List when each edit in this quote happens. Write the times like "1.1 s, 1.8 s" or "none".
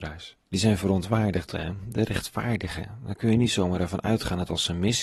1.5 s